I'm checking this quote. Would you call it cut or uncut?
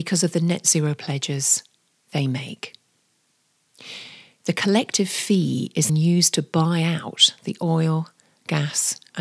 cut